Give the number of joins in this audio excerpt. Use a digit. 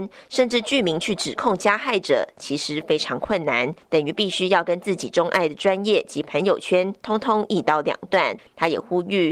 0